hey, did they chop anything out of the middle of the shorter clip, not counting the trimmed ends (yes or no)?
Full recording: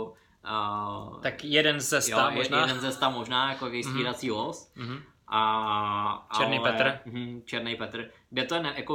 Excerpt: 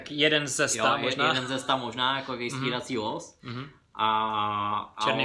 no